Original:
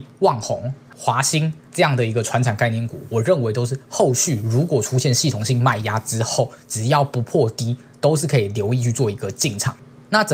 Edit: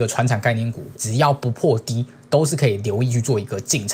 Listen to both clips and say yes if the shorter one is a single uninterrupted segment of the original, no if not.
no